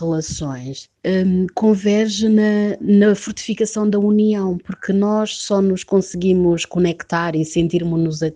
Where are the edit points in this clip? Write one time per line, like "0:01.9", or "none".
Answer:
0:01.0